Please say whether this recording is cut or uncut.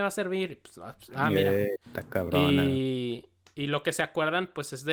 cut